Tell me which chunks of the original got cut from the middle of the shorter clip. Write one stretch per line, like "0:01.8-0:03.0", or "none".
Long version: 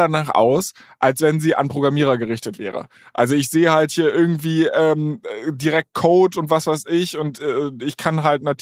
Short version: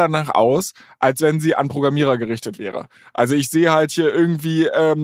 none